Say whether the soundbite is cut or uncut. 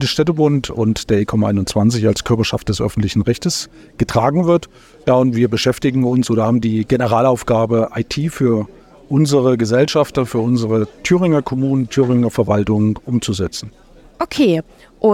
uncut